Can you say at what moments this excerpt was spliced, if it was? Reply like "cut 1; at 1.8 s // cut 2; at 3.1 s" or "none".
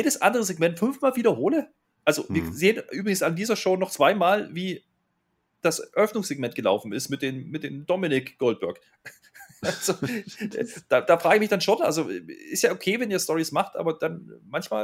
none

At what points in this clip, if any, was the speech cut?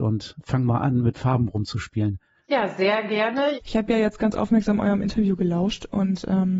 cut 1; at 2.4 s // cut 2; at 3.5 s

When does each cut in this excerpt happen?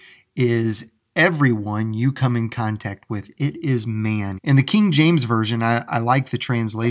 cut 1; at 4.4 s

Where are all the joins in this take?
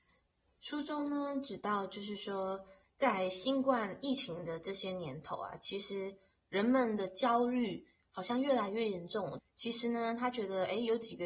cut 1; at 9.4 s

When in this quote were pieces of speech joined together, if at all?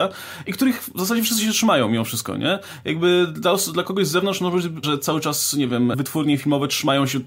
cut 1; at 4.8 s // cut 2; at 5.9 s

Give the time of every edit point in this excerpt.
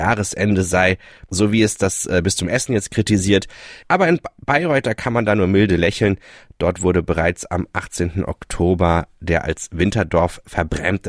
none

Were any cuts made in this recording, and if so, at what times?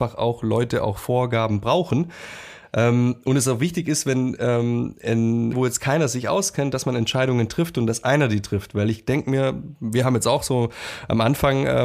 cut 1; at 5.5 s

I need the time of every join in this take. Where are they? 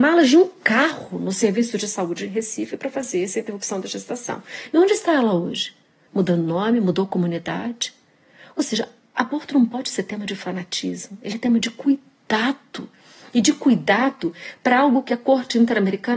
none

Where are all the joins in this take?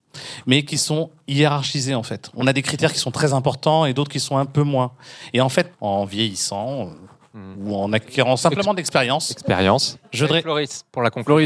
cut 1; at 5.7 s // cut 2; at 10.0 s

